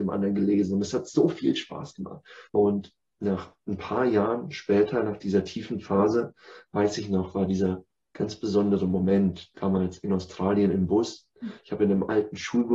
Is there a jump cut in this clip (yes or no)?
yes